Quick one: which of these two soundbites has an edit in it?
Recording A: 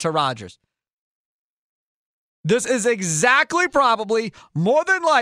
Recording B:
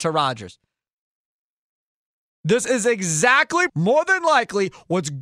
B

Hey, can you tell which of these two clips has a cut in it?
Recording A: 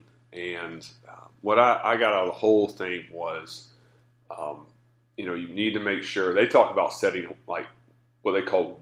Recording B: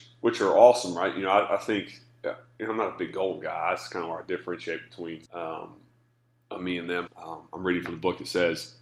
B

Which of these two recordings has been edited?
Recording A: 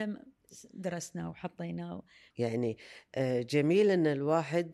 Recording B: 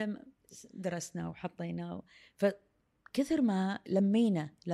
A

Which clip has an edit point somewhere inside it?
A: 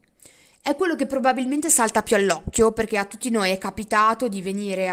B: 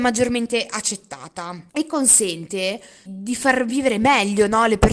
B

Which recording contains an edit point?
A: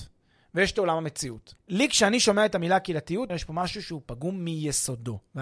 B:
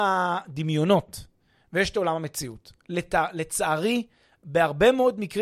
A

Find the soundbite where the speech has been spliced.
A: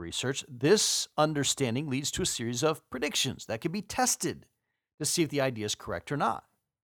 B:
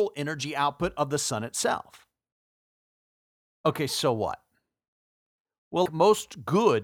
B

